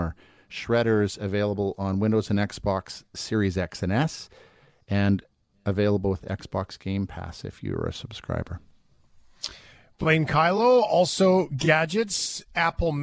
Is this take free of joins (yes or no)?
yes